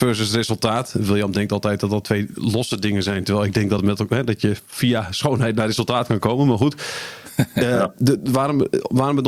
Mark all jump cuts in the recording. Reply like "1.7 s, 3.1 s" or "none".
none